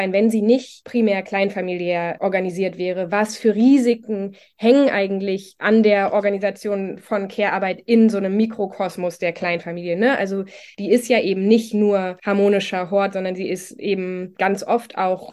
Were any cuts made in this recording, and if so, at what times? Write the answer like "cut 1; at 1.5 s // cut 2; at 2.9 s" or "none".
none